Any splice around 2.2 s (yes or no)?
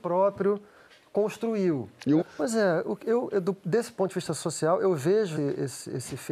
yes